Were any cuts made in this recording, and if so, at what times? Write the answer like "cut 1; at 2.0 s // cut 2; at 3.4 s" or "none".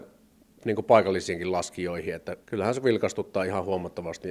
cut 1; at 2.4 s